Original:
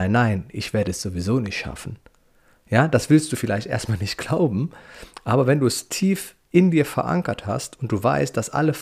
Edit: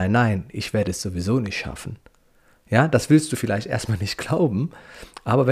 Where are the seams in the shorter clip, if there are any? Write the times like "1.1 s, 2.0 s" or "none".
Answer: none